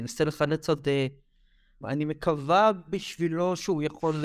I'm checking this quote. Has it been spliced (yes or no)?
yes